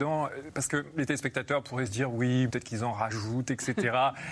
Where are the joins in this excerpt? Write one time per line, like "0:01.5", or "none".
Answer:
0:02.5